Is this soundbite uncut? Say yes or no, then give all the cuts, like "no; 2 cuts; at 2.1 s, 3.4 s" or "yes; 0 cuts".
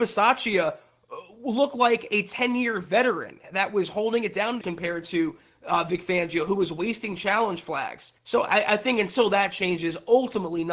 no; 2 cuts; at 4.6 s, 8.2 s